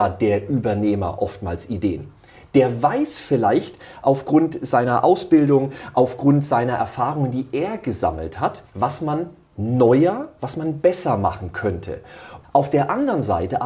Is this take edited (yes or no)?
yes